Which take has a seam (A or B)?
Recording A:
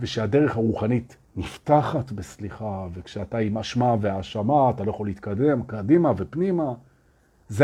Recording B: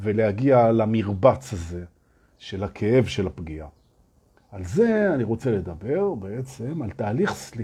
B